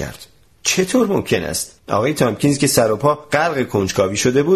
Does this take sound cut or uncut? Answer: cut